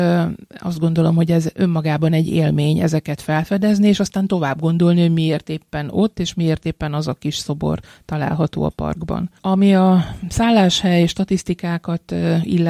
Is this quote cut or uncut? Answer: cut